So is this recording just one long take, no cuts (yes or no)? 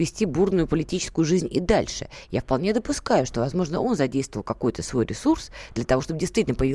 yes